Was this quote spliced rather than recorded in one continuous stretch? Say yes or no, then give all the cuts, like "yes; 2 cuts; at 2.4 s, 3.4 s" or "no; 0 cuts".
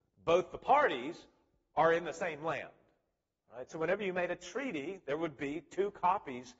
yes; 1 cut; at 3.7 s